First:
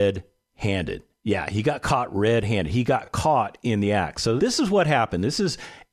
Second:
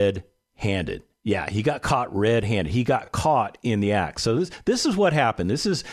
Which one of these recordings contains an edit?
first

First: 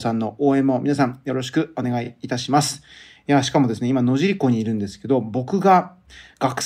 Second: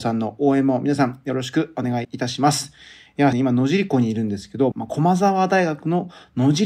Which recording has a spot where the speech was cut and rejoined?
second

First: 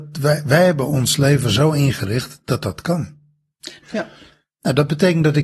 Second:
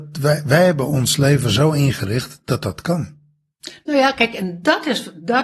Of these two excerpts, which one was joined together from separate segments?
first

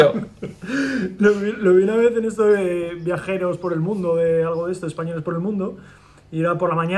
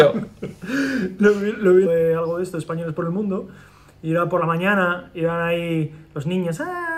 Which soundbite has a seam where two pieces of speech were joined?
second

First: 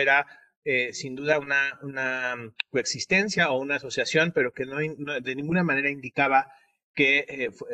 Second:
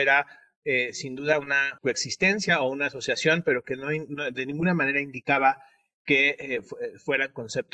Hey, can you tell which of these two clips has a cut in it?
second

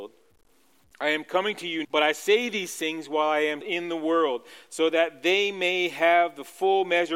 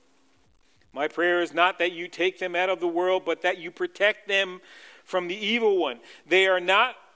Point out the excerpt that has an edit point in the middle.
first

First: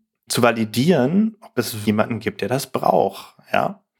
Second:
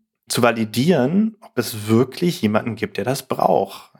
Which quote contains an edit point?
first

